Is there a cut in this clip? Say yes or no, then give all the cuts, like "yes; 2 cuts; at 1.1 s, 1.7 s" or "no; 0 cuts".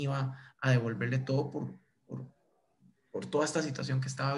no; 0 cuts